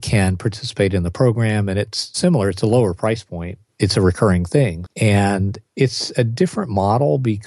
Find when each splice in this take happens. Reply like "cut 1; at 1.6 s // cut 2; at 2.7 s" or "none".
cut 1; at 4.9 s